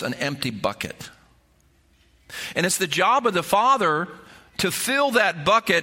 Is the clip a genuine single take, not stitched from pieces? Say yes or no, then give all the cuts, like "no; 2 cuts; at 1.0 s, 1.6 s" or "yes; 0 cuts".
yes; 0 cuts